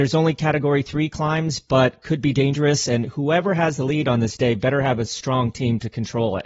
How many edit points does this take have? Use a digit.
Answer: 0